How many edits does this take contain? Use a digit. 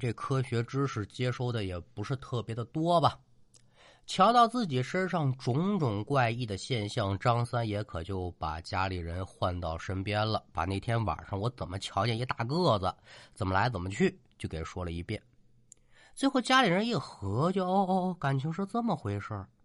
0